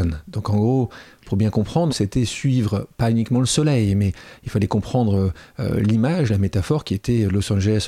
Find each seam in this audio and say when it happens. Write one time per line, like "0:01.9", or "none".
none